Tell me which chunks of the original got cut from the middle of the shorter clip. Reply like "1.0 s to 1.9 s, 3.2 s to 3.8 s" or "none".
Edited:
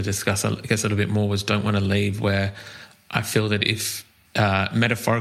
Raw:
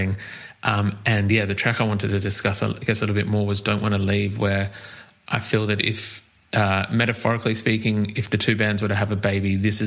none